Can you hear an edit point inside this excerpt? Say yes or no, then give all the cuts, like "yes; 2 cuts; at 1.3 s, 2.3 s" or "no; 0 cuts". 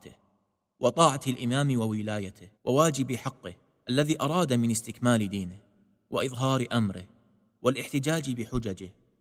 yes; 1 cut; at 2.6 s